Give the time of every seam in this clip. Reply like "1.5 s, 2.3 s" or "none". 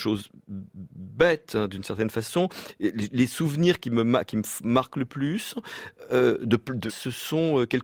6.9 s